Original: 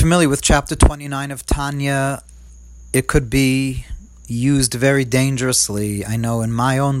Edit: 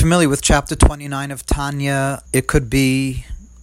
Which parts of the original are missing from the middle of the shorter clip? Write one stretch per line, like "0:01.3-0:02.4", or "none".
0:02.3-0:02.9